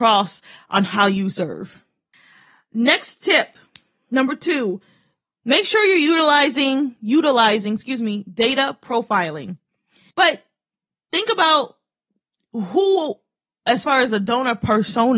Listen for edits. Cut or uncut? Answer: cut